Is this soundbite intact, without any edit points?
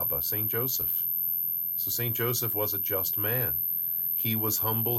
no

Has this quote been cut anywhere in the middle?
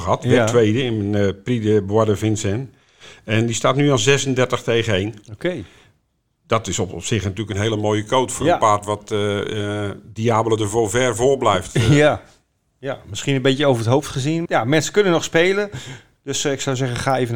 yes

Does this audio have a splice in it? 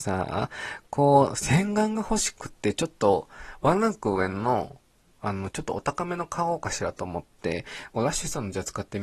no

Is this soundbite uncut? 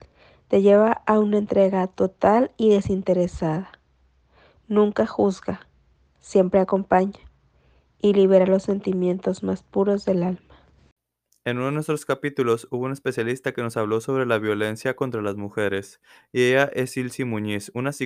yes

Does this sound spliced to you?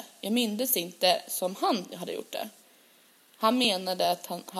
no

